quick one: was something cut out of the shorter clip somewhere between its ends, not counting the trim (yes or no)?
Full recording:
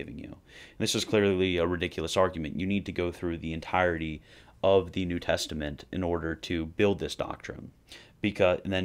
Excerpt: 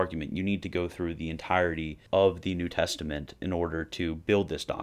yes